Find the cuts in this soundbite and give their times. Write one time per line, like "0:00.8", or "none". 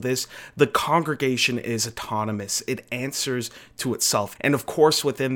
0:04.4